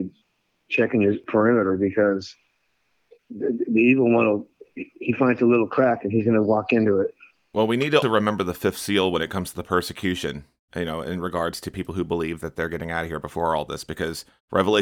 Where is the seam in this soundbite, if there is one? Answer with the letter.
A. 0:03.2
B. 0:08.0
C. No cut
B